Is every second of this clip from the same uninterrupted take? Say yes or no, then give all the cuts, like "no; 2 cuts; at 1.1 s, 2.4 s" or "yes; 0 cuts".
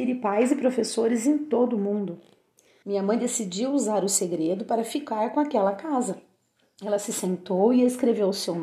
no; 1 cut; at 2.8 s